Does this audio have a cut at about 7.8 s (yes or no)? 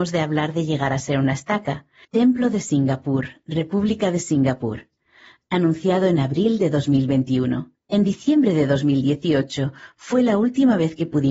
yes